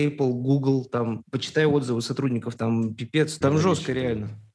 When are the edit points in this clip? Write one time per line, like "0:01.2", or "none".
0:03.4